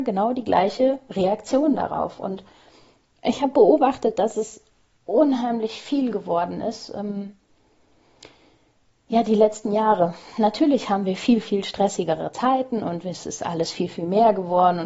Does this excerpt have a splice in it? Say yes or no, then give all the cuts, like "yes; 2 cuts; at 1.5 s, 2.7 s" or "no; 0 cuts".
no; 0 cuts